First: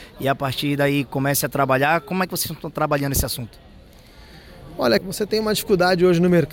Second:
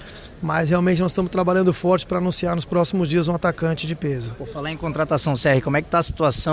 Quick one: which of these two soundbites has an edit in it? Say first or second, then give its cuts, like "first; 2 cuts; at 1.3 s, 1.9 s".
first; 1 cut; at 5.0 s